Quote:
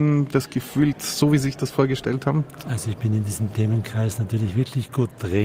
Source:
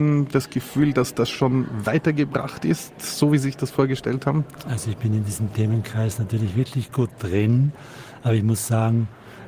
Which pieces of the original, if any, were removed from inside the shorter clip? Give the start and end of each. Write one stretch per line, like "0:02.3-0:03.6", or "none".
0:00.9-0:02.9